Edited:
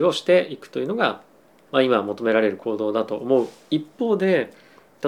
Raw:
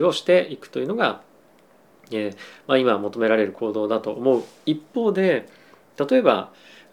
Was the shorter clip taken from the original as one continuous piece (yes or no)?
no